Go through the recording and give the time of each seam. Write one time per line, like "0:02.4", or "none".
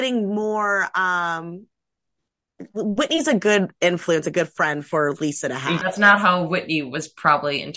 0:05.8